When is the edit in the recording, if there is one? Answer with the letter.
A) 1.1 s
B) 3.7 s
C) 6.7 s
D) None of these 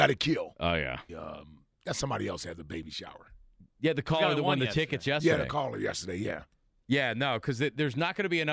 A